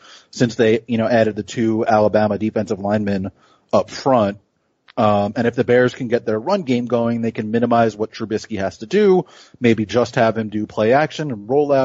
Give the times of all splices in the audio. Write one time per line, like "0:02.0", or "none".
none